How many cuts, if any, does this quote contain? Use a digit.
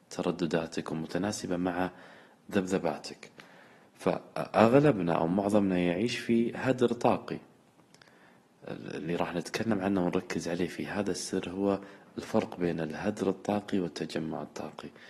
0